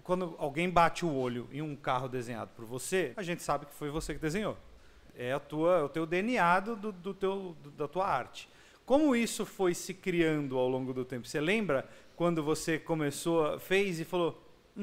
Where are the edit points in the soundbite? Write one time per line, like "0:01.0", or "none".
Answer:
0:03.1
0:05.0